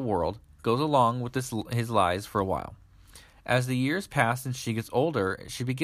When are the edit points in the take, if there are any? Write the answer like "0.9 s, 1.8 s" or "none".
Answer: none